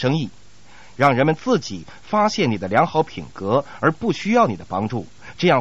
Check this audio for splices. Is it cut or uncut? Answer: cut